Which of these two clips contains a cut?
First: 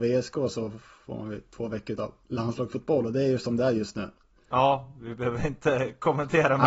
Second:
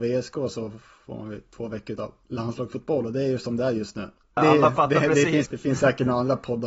second; 2 cuts; at 4.4 s, 5.4 s

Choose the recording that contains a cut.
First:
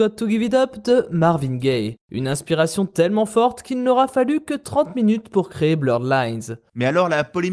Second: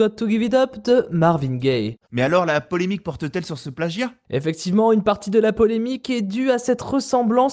second; 1 cut; at 2.0 s

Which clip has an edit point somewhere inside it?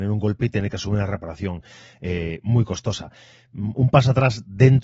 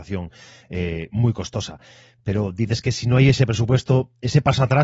first; 1 cut; at 3.5 s

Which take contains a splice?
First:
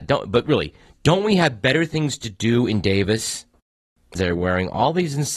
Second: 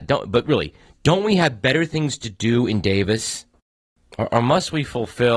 first; 1 cut; at 4.2 s

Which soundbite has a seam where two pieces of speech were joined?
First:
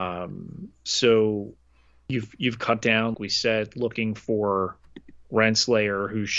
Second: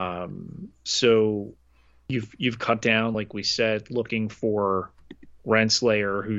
first; 1 cut; at 3.1 s

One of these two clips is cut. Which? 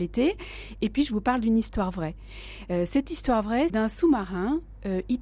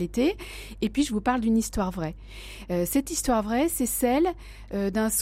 first; 1 cut; at 3.7 s

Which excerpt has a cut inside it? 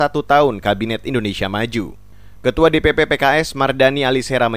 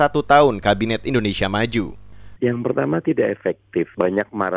second; 1 cut; at 2.4 s

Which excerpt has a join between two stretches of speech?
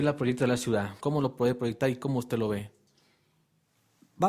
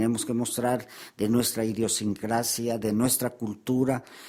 first; 1 cut; at 1.0 s

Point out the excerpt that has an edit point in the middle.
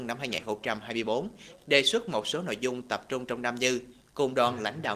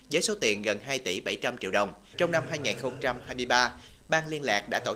second; 1 cut; at 2.1 s

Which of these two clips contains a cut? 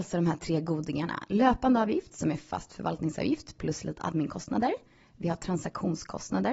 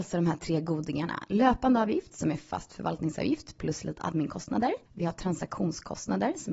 second; 1 cut; at 4.8 s

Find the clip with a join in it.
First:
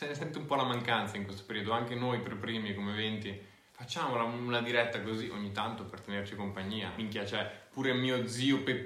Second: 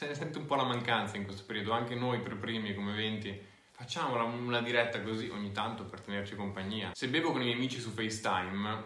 second; 1 cut; at 6.9 s

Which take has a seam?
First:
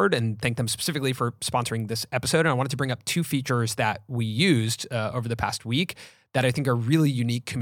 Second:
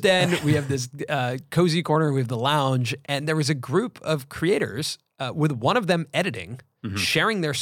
second; 1 cut; at 3.0 s

